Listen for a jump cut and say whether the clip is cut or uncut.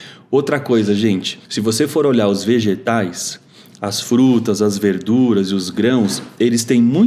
cut